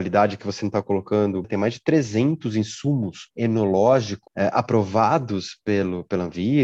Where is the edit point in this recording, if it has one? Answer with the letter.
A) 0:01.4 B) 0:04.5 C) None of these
A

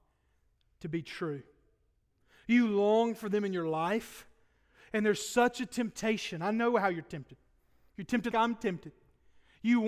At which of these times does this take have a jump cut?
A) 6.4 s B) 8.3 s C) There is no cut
B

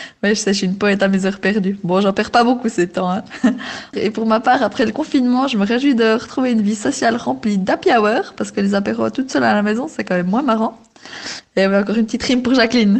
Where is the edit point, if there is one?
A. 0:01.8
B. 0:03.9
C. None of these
B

